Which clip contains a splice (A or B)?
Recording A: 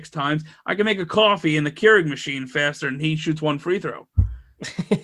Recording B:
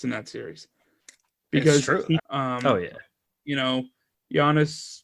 B